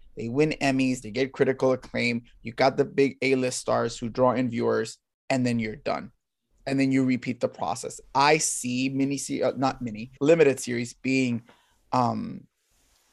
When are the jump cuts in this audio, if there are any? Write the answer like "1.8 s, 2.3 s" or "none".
1.0 s, 10.2 s